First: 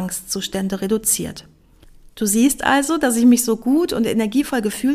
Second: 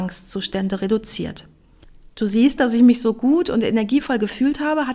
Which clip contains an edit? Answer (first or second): second